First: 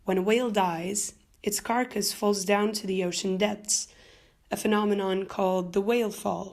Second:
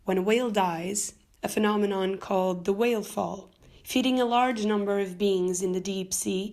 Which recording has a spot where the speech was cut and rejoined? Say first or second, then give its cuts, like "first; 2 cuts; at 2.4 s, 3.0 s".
second; 1 cut; at 1.3 s